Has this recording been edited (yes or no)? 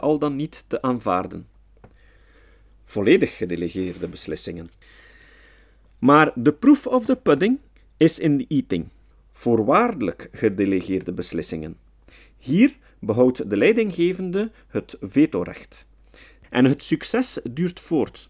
yes